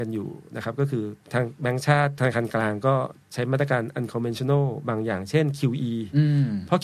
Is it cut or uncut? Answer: cut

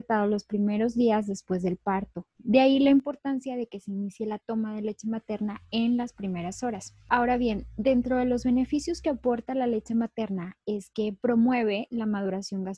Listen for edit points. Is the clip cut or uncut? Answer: uncut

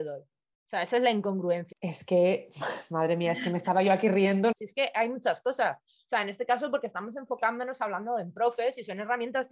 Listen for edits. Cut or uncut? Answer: cut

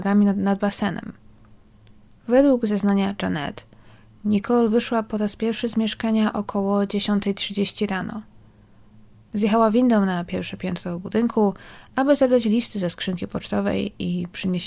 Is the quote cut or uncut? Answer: uncut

